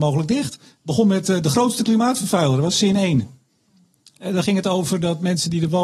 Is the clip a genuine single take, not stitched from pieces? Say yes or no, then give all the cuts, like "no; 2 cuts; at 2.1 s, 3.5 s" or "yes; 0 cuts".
yes; 0 cuts